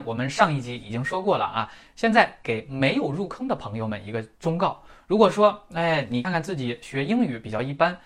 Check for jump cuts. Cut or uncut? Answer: cut